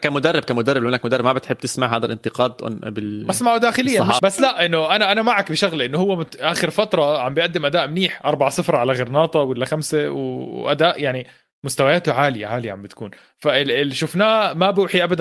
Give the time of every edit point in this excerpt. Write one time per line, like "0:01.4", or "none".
0:04.2